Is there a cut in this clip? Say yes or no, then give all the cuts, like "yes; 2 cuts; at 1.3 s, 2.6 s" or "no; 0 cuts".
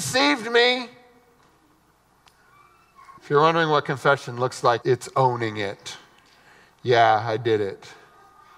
yes; 2 cuts; at 3.2 s, 4.8 s